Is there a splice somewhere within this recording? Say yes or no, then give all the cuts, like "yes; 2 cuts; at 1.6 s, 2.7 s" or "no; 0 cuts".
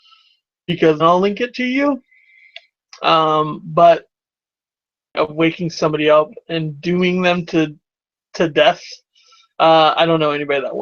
yes; 1 cut; at 1.0 s